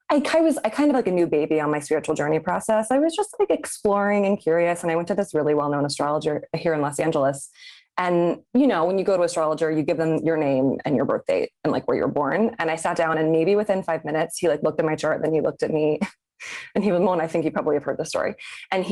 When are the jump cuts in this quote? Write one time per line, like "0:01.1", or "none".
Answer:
none

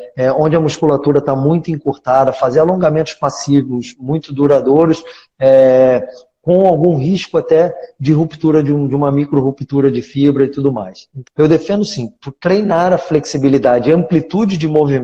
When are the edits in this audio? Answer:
0:11.3

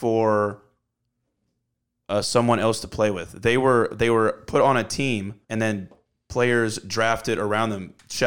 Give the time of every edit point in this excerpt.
0:05.4

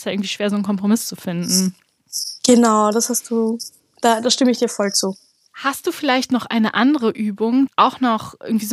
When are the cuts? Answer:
0:05.5
0:07.7

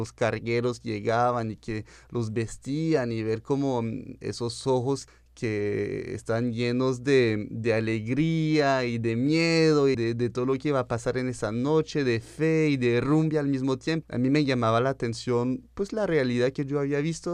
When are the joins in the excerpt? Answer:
0:09.9
0:14.0

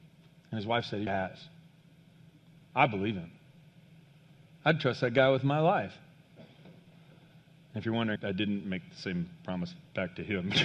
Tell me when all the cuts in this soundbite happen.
0:01.1
0:08.2

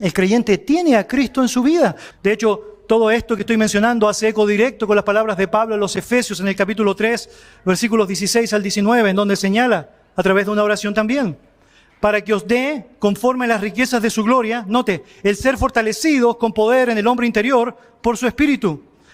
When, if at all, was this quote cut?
0:02.1

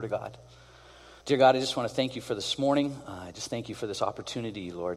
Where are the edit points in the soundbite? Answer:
0:01.2

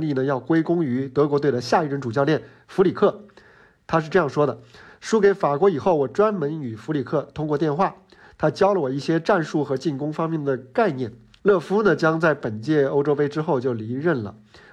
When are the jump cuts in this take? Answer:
0:11.4

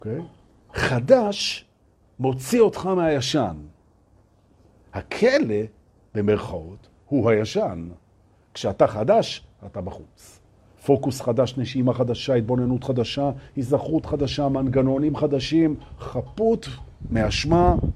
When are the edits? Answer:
none

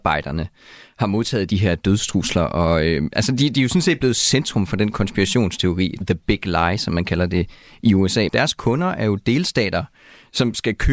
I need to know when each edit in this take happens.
0:06.0
0:08.3

